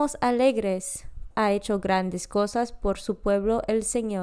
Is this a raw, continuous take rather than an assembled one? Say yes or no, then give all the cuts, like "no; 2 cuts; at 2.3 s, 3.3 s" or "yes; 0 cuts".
no; 1 cut; at 1.3 s